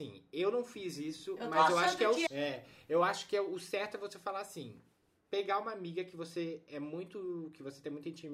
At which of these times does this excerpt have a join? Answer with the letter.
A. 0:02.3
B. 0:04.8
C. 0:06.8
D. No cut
A